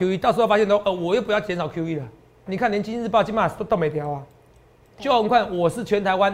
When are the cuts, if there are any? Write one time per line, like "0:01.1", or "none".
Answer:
0:02.5
0:04.9